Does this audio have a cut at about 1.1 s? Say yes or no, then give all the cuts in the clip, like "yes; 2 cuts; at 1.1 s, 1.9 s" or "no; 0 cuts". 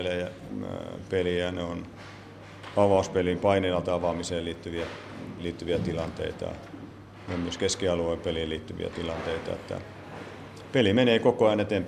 no; 0 cuts